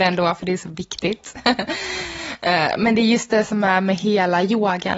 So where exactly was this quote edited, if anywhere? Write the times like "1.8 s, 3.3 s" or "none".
none